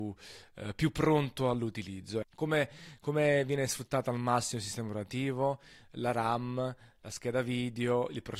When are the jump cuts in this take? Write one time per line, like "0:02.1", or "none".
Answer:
0:02.2